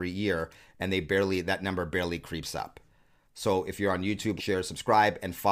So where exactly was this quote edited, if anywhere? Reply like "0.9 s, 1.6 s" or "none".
3.2 s, 4.4 s